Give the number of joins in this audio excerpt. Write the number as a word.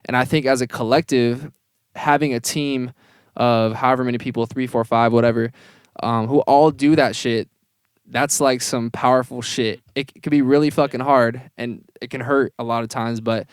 one